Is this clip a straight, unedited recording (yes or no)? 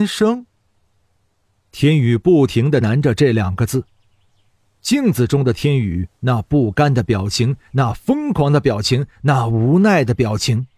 no